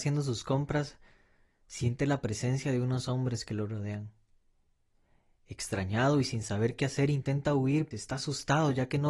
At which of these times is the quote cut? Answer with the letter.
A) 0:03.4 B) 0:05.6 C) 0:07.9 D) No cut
C